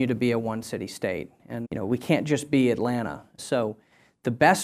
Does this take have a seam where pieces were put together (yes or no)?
yes